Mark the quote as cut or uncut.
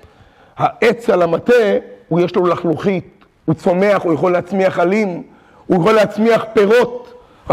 uncut